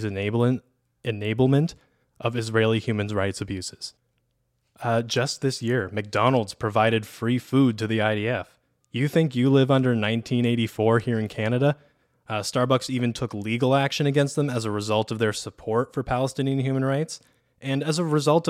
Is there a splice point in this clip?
yes; 2 cuts; at 8.8 s, 12.1 s

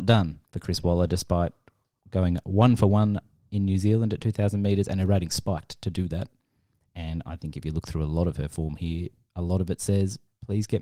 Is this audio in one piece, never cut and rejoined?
yes; 0 cuts

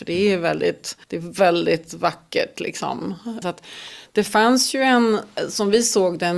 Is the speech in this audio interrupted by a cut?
yes; 2 cuts; at 1.0 s, 3.4 s

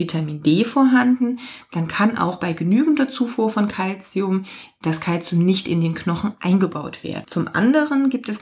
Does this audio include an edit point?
yes; 1 cut; at 7.2 s

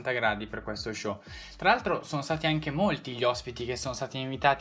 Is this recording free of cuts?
yes; 0 cuts

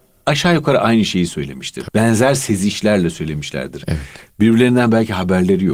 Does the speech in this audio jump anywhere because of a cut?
yes; 1 cut; at 1.9 s

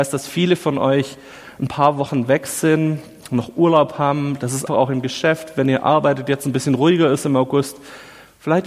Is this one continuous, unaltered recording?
no; 1 cut; at 4.7 s

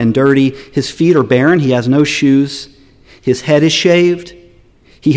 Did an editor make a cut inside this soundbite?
no; 0 cuts

